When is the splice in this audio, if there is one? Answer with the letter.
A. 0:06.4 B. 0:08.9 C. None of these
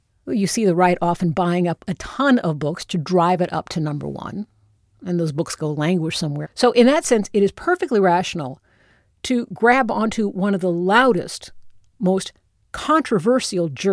A